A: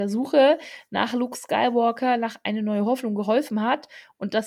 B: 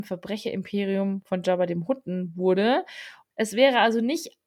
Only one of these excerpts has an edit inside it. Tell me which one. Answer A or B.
B